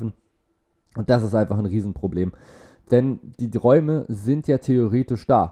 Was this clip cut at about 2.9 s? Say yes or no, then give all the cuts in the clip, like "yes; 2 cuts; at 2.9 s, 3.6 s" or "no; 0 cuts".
no; 0 cuts